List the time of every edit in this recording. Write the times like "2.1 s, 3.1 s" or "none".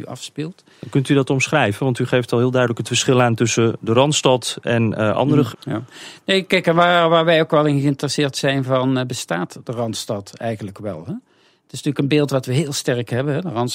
5.5 s